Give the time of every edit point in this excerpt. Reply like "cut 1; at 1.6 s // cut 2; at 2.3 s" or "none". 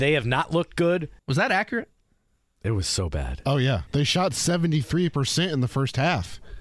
cut 1; at 1.2 s // cut 2; at 3.9 s